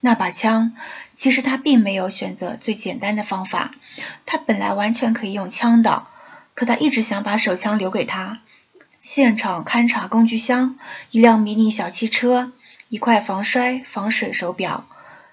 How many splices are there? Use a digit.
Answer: 1